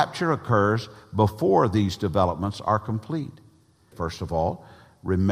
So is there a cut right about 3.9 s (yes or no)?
yes